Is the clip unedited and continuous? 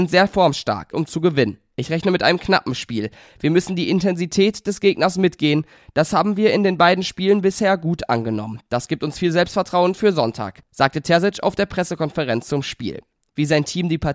no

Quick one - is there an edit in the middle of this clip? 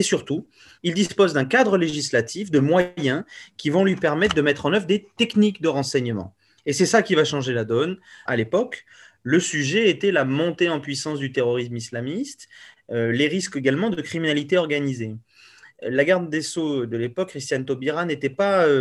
yes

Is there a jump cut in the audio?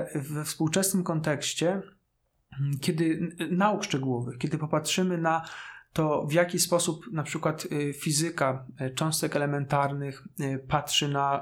no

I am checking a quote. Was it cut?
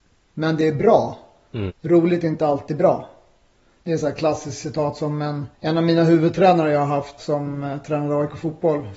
yes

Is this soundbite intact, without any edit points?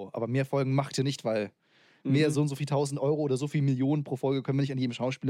yes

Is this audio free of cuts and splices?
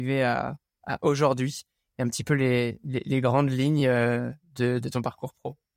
yes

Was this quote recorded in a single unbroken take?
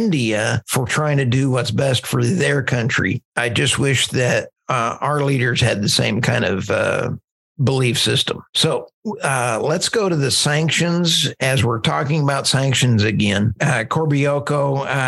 yes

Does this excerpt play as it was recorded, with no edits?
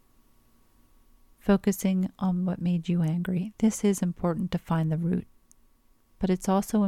yes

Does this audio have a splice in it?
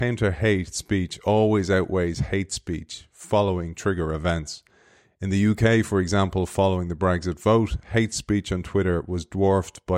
no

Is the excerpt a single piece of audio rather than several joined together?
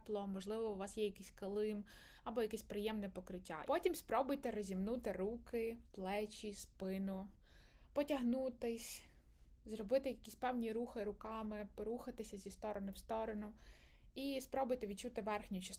no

